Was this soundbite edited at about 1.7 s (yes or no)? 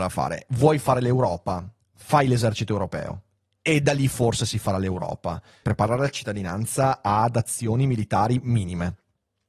no